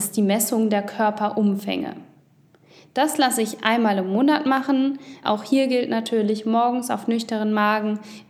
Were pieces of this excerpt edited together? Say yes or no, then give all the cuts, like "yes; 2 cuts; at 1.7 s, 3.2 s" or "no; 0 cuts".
yes; 1 cut; at 5.2 s